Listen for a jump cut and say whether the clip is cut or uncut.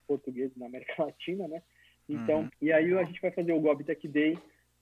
cut